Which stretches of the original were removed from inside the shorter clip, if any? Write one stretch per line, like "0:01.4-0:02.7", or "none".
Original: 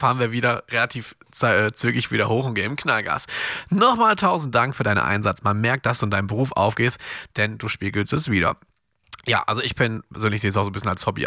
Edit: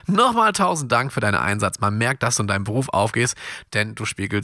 none